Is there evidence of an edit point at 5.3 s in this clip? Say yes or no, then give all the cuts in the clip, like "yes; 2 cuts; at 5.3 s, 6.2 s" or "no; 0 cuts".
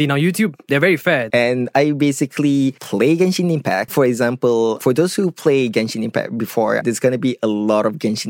no; 3 cuts; at 1.3 s, 3.9 s, 6.8 s